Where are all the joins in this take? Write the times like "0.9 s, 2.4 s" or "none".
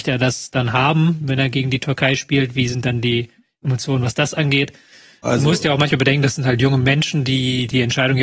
5.2 s